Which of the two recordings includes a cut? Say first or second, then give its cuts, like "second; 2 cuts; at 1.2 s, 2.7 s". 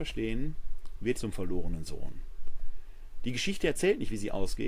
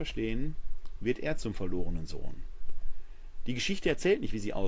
first; 1 cut; at 1.2 s